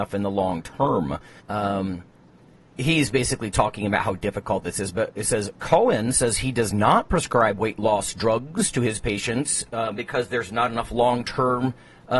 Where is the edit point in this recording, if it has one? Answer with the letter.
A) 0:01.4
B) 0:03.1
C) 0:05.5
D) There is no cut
A